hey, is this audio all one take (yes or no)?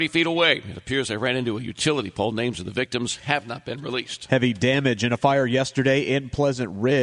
yes